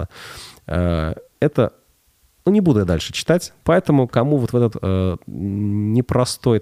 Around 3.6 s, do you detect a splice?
yes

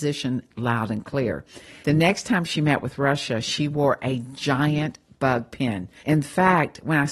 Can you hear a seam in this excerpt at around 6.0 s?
yes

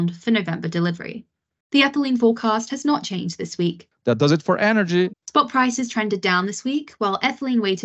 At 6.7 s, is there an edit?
no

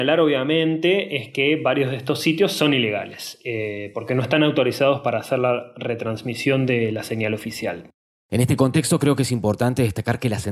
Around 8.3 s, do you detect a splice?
yes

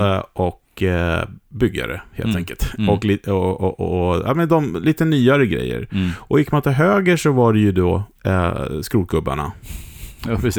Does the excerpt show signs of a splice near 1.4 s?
yes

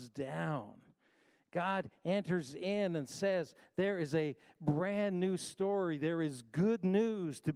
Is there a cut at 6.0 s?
no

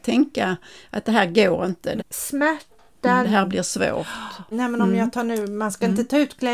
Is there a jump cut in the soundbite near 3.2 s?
yes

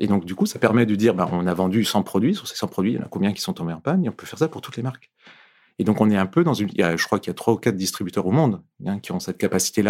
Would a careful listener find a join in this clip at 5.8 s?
no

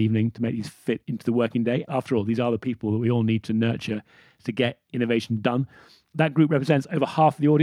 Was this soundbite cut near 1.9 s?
yes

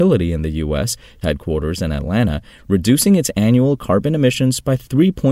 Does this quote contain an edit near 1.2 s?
yes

